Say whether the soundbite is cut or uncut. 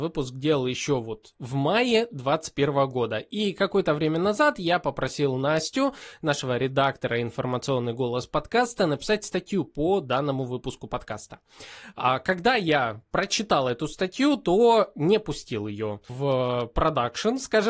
uncut